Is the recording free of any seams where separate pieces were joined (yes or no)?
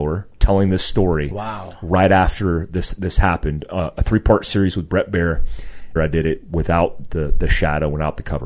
no